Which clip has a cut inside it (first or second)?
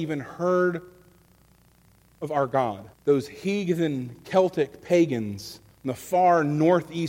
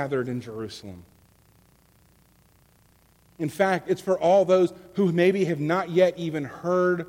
first